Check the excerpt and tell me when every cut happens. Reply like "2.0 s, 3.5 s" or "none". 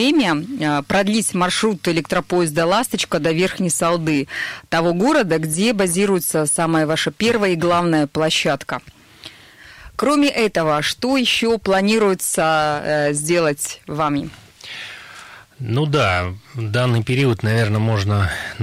none